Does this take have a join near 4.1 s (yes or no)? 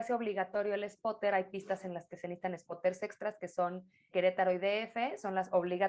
yes